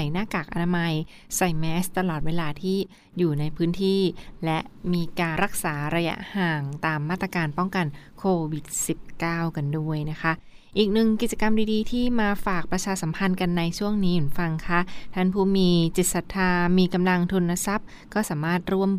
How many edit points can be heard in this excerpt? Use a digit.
1